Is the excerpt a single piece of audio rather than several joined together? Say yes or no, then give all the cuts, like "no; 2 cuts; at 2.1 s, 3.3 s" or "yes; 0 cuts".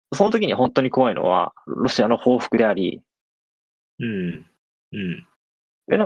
no; 1 cut; at 4.8 s